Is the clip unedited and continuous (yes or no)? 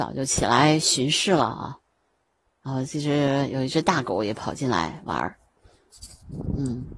yes